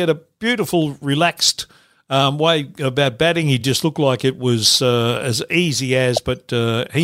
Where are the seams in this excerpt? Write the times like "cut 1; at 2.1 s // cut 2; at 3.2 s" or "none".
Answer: none